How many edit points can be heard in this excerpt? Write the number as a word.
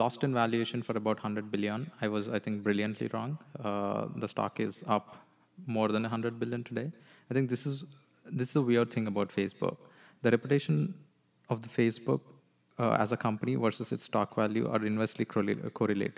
zero